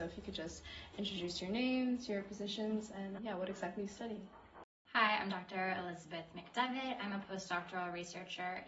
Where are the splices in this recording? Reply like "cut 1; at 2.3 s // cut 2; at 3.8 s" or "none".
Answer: cut 1; at 3.2 s